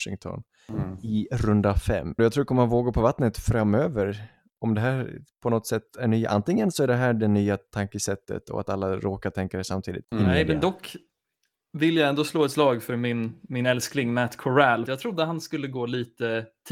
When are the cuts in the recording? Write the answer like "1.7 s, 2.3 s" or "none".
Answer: 2.2 s, 10.0 s, 14.9 s